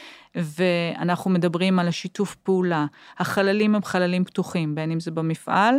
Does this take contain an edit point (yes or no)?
no